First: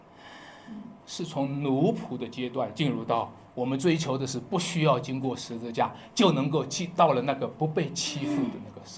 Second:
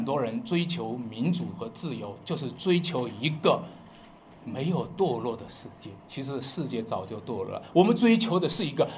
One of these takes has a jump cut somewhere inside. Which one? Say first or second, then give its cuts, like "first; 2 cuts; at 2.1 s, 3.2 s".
first; 2 cuts; at 1.0 s, 3.5 s